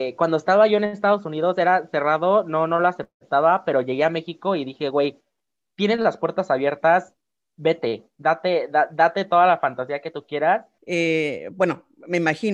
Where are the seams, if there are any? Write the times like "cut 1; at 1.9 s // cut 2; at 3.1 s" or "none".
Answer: cut 1; at 10.8 s